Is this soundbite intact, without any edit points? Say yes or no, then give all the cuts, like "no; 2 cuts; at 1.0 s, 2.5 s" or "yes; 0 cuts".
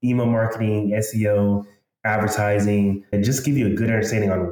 no; 1 cut; at 3.1 s